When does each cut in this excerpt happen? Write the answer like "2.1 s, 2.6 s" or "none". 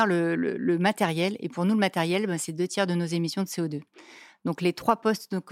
none